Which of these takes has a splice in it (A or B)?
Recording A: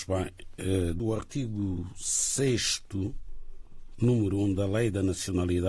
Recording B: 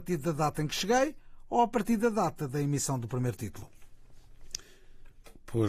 A